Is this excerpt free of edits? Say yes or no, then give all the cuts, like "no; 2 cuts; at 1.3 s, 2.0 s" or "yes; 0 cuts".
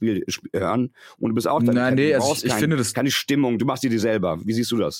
yes; 0 cuts